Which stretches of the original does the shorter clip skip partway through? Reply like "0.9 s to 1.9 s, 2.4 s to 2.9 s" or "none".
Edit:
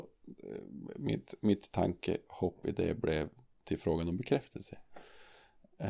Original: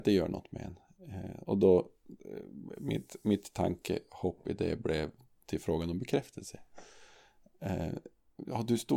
none